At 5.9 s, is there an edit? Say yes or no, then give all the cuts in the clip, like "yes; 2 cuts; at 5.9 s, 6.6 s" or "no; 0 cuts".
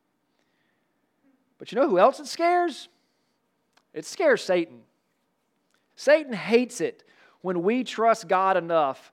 yes; 1 cut; at 5.9 s